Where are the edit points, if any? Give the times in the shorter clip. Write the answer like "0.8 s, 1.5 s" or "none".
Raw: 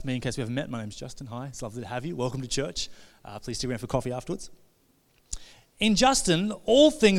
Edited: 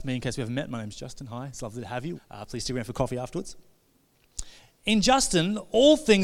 2.1 s

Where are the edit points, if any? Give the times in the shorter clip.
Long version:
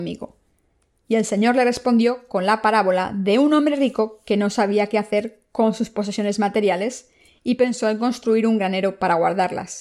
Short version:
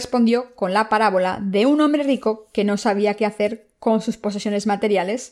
none

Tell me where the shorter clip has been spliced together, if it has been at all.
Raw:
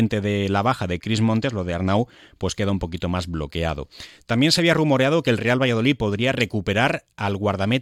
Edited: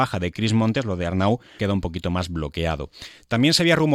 1.6 s

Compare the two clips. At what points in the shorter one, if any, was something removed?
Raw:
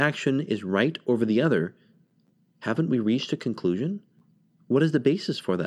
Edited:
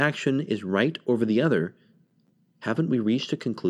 none

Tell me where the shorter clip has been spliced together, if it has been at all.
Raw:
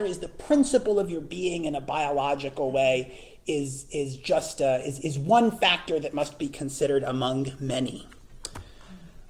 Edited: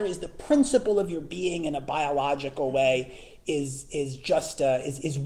none

